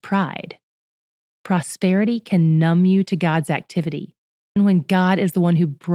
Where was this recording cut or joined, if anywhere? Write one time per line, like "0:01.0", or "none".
0:04.6